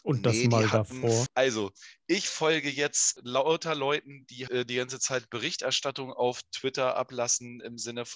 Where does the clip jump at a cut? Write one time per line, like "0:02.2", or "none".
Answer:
0:01.3
0:04.5